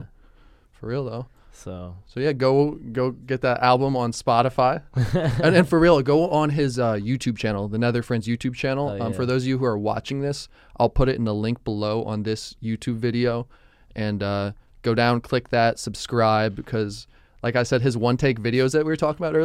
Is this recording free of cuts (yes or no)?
yes